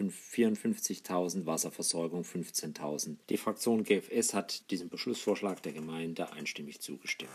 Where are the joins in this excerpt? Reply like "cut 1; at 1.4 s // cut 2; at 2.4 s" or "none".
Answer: cut 1; at 3.2 s // cut 2; at 4.6 s